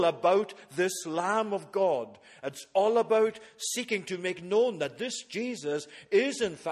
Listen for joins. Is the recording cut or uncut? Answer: uncut